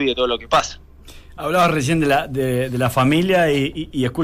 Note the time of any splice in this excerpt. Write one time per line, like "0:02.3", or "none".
none